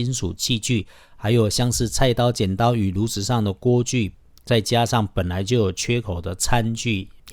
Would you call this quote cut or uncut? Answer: uncut